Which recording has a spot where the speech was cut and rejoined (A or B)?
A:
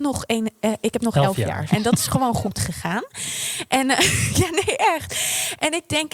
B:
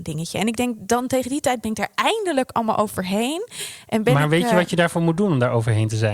A